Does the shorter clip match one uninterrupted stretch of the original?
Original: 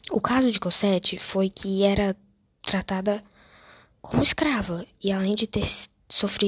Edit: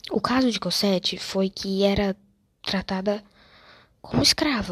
yes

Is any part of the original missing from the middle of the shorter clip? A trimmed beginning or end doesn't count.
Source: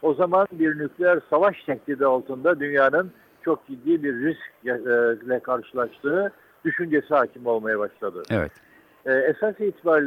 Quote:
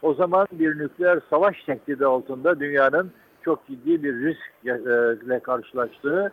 no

